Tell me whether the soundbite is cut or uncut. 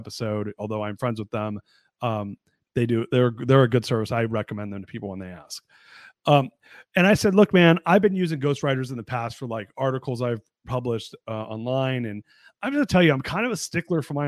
uncut